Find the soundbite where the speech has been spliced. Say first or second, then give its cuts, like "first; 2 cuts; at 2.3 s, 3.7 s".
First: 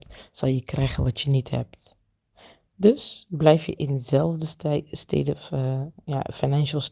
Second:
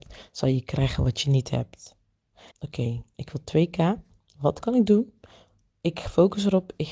second; 1 cut; at 2.5 s